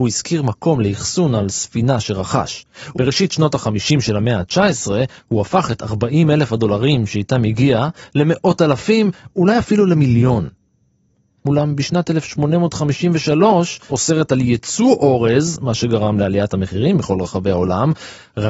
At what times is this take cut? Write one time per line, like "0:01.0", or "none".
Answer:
0:02.9
0:11.4
0:13.9